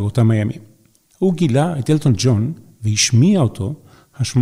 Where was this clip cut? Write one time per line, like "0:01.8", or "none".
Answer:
none